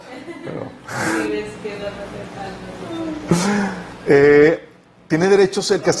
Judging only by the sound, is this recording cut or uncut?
uncut